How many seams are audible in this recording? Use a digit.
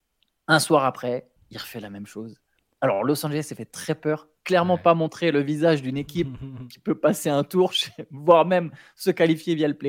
1